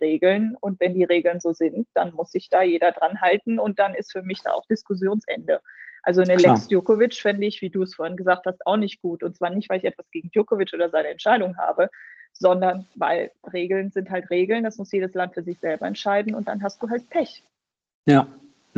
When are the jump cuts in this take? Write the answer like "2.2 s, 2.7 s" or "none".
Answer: none